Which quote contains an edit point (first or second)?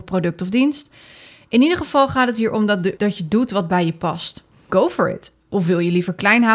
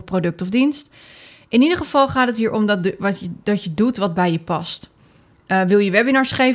first